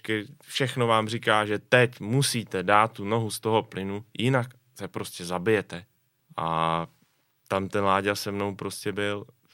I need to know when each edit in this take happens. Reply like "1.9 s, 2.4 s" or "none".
6.2 s